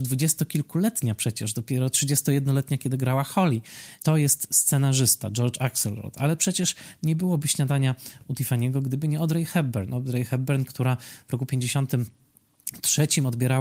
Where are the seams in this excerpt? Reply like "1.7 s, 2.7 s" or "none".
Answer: 4.0 s